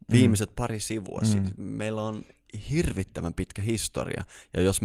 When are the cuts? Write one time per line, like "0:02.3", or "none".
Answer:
none

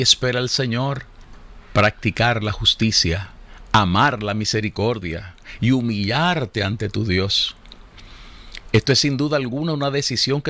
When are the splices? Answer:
none

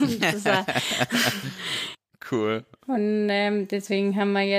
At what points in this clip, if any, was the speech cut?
none

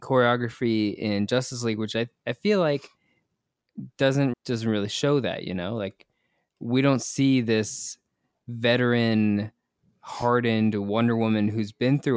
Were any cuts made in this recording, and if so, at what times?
0:04.3

